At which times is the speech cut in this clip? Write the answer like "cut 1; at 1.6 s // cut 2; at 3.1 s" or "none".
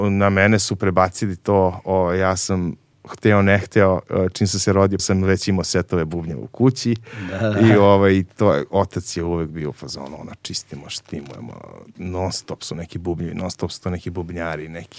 cut 1; at 5.0 s